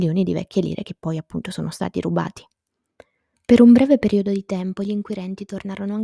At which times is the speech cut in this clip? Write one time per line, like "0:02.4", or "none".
0:03.3